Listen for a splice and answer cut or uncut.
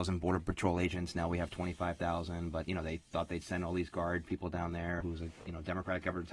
cut